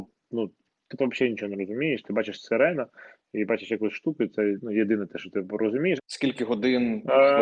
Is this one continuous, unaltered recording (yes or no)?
no